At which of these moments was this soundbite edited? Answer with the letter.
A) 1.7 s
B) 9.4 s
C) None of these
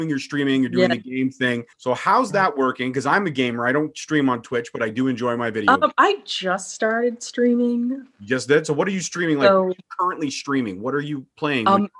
A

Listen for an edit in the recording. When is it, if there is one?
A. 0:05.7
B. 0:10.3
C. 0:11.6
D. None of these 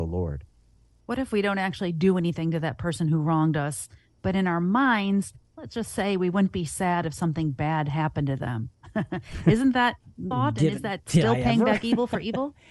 B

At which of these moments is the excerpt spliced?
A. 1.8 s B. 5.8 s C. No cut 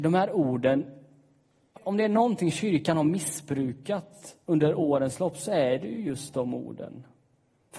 A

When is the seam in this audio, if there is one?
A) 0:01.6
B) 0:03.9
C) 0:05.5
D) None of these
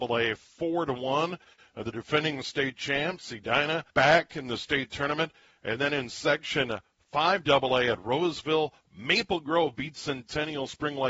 B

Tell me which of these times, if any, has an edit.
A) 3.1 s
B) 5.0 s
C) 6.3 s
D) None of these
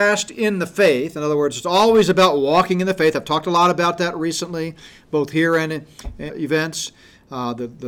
C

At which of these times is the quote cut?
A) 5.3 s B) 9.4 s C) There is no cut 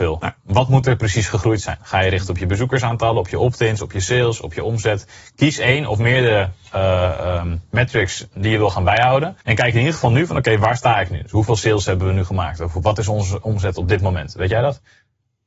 B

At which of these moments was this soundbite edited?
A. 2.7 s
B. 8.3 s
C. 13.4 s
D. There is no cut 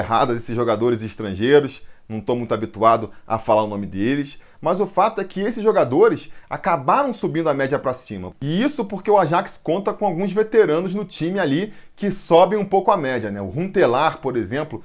B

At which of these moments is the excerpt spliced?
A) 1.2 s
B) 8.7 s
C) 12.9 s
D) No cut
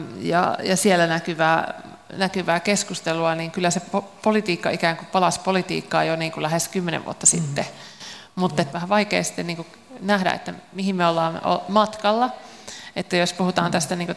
B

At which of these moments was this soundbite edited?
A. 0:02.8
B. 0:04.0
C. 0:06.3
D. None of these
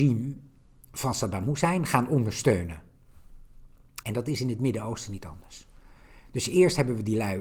B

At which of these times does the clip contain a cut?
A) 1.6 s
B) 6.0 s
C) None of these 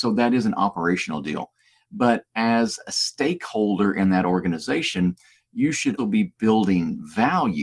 B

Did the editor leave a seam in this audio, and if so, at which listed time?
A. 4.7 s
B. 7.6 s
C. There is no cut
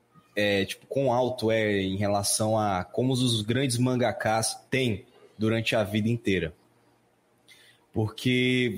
A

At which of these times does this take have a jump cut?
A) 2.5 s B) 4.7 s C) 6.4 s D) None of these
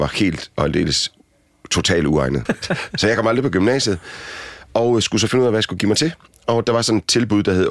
A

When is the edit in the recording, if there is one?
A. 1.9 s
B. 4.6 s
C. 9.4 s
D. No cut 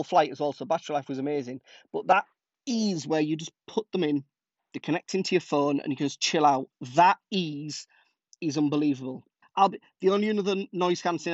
C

